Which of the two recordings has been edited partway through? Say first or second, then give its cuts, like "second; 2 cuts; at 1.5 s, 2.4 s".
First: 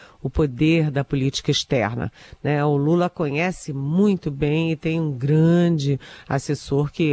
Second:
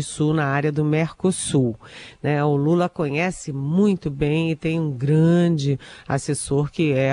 second; 1 cut; at 2.2 s